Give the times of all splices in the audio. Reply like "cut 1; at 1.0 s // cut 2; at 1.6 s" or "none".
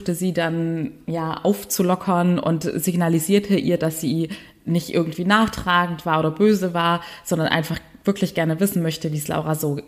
none